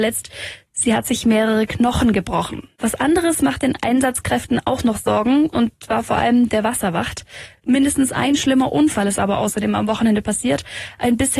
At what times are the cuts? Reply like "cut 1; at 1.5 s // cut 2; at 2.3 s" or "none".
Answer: cut 1; at 2.8 s // cut 2; at 7.6 s